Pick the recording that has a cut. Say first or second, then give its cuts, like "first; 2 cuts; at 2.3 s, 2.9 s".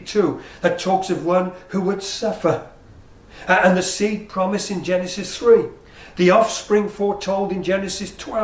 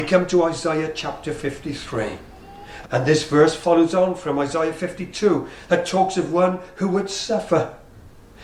second; 1 cut; at 2.8 s